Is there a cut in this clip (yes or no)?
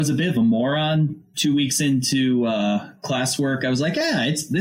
no